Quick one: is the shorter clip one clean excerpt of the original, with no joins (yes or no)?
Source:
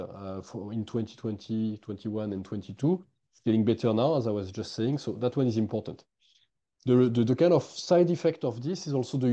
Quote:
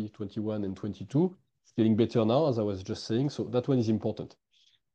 yes